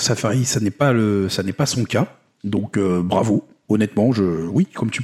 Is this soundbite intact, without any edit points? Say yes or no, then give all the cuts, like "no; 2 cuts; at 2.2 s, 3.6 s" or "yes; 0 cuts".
yes; 0 cuts